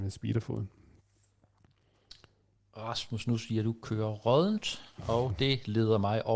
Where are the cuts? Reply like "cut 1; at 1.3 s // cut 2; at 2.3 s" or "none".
none